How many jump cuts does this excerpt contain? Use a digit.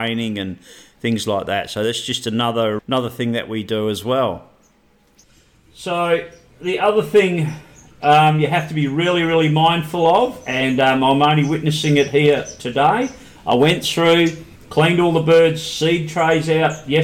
1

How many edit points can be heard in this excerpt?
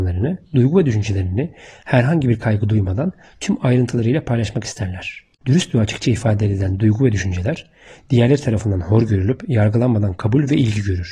0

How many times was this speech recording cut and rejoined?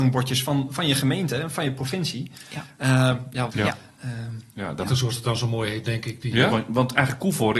3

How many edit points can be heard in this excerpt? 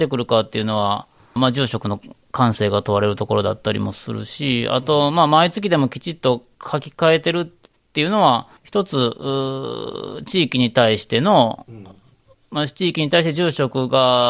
2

